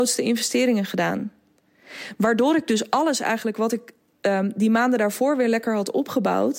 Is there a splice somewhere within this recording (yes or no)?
no